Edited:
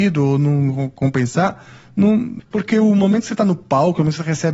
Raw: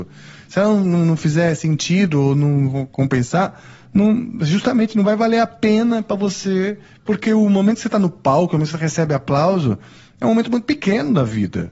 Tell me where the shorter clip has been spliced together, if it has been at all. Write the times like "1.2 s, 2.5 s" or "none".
2.4 s